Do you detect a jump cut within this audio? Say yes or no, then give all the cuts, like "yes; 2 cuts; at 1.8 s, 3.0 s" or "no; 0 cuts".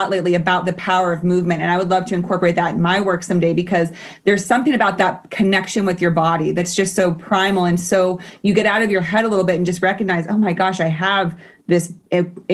no; 0 cuts